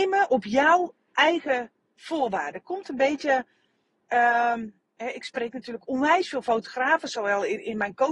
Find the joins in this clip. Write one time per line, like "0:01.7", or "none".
none